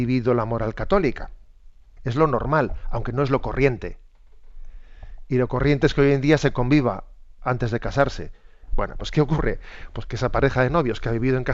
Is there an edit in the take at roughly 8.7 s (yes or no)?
yes